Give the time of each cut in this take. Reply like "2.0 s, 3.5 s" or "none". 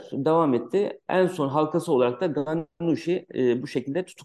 none